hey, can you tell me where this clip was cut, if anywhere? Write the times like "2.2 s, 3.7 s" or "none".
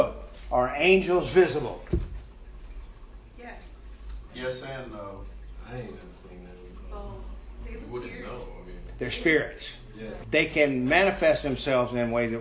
4.3 s, 10.2 s